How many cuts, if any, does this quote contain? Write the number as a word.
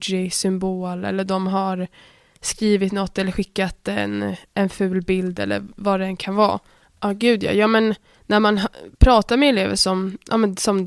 one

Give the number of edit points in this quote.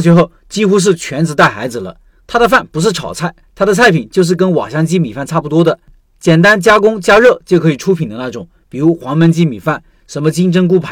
two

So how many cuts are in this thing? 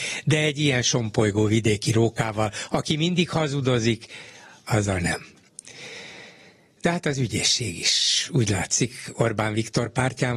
zero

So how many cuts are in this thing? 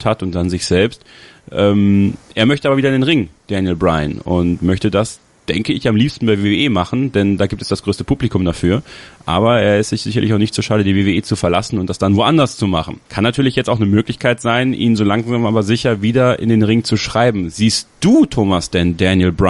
one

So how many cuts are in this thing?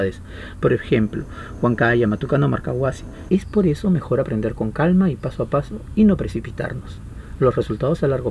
one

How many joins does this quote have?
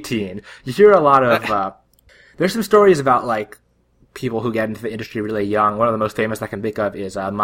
zero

